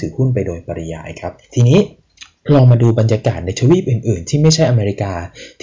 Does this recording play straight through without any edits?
no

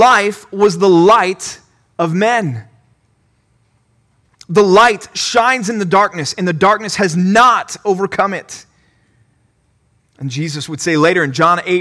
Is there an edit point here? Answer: no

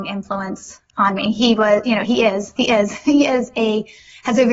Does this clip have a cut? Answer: yes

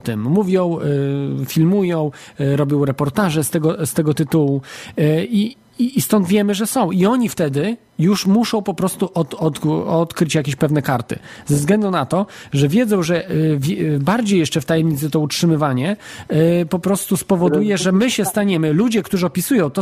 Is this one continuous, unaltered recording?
yes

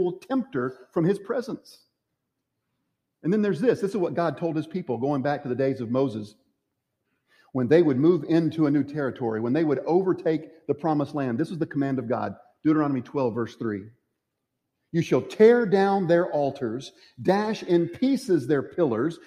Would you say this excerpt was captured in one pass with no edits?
yes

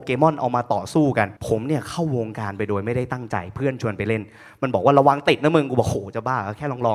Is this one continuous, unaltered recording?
no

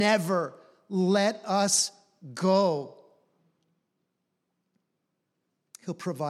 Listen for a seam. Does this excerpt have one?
no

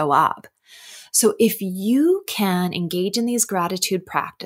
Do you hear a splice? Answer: no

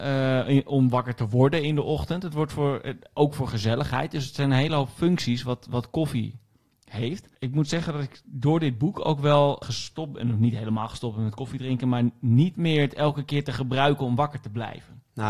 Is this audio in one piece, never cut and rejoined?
no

